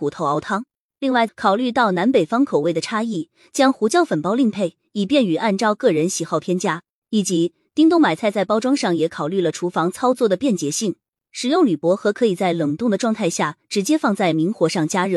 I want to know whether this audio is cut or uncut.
cut